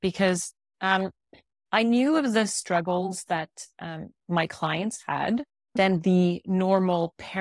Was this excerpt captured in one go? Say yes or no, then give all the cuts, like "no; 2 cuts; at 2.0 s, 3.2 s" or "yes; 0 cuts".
no; 1 cut; at 5.8 s